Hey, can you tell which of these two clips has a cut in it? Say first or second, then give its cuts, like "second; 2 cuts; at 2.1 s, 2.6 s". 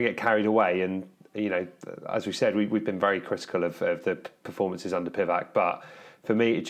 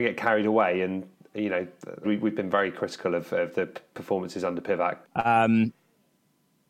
second; 2 cuts; at 2.0 s, 5.0 s